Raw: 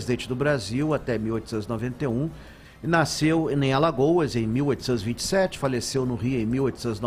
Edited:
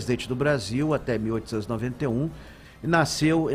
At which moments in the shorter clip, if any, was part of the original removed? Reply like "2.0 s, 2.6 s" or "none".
none

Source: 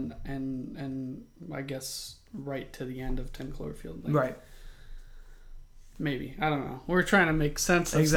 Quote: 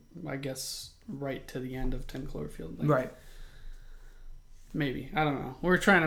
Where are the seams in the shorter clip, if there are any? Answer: none

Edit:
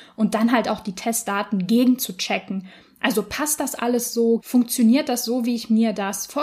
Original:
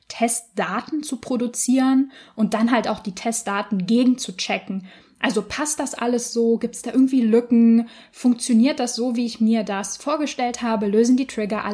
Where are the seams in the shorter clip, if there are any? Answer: 4.4 s

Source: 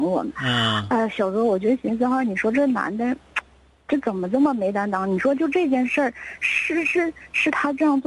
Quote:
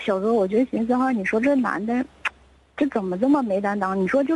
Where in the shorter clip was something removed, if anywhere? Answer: none

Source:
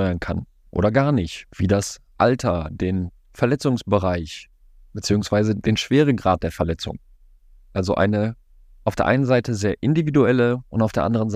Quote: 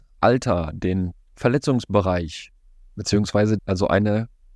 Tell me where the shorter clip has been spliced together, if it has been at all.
3.6 s

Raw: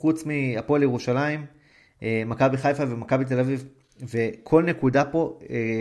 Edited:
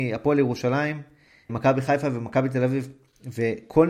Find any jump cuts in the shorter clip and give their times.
1.5 s

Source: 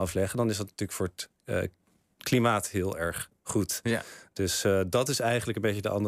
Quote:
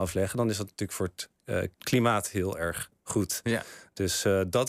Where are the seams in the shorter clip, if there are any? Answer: 1.7 s

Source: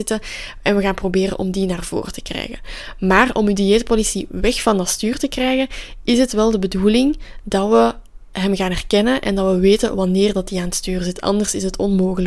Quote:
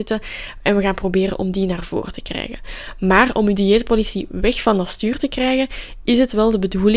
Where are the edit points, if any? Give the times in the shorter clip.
none

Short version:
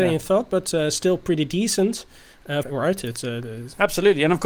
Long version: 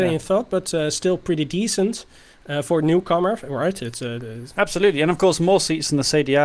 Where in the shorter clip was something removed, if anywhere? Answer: 2.6 s

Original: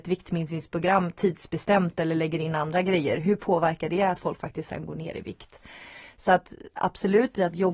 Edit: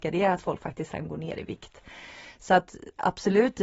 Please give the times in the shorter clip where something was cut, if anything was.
none

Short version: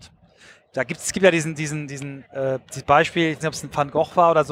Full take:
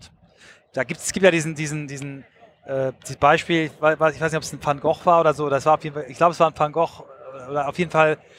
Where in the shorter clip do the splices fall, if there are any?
2.3 s, 3.4 s

